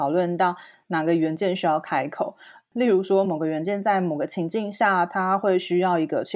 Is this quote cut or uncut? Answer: uncut